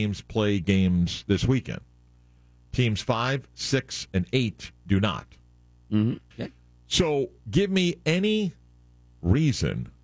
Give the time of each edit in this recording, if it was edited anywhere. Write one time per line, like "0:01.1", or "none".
0:04.1
0:06.3
0:07.4